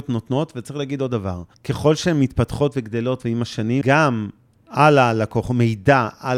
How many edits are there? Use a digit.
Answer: 2